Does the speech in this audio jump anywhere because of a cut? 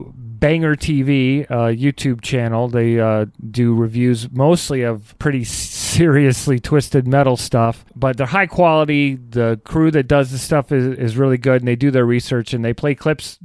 no; 0 cuts

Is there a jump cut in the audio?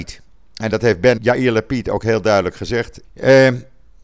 yes; 2 cuts; at 1.2 s, 3.0 s

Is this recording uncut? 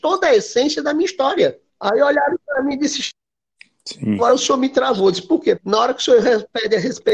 no; 2 cuts; at 1.7 s, 5.6 s

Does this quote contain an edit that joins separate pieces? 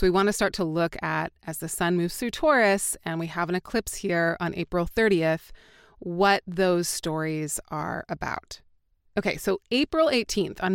no; 0 cuts

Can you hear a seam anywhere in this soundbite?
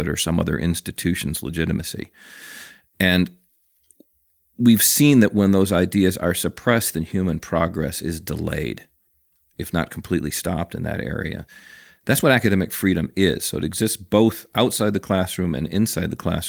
no; 0 cuts

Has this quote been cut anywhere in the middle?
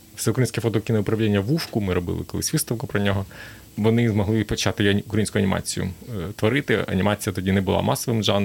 yes; 1 cut; at 3.7 s

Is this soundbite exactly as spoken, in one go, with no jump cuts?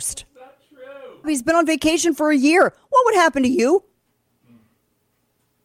no; 1 cut; at 1.2 s

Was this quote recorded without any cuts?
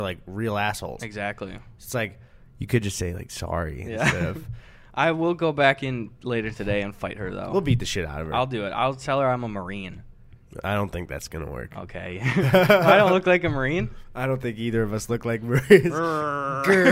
yes; 0 cuts

